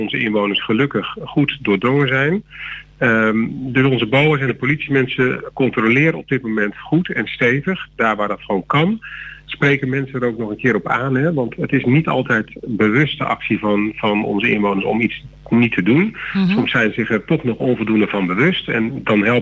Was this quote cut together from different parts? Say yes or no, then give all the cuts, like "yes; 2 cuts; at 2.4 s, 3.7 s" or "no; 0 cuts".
no; 0 cuts